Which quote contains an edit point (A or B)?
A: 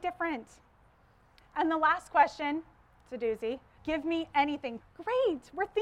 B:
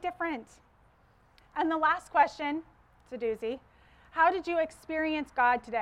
A